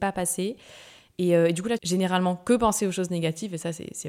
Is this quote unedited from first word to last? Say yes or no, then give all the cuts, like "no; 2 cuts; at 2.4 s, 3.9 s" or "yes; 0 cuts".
no; 1 cut; at 1.8 s